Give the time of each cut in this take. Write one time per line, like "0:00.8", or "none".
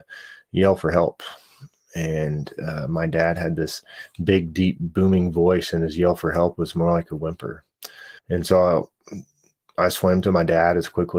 0:08.2